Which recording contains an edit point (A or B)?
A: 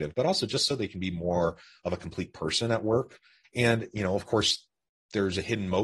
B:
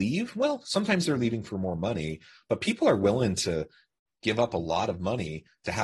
A